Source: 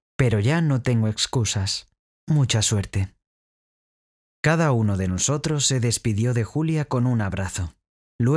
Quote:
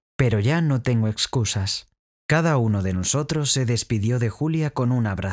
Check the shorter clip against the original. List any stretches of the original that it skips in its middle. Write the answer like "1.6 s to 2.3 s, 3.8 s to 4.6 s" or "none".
2.1 s to 4.3 s